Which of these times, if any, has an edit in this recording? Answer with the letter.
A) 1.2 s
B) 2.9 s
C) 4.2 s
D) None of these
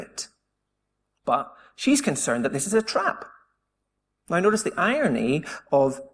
C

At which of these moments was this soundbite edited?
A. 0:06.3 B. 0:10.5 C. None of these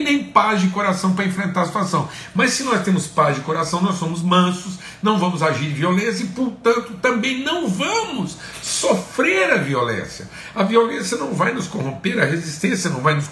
C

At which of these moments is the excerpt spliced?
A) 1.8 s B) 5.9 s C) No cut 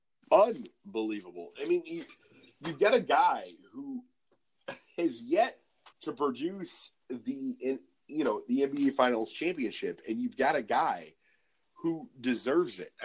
B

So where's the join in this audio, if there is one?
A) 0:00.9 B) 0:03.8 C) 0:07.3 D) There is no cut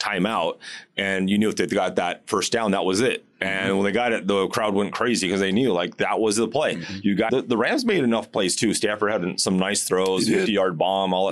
C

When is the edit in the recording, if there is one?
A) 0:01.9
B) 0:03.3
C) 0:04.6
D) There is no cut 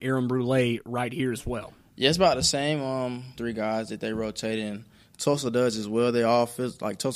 B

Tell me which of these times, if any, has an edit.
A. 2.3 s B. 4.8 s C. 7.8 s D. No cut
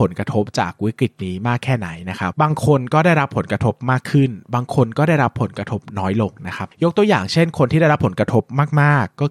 A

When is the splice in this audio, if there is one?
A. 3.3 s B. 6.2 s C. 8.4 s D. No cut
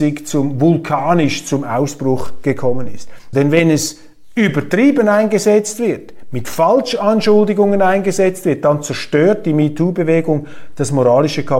A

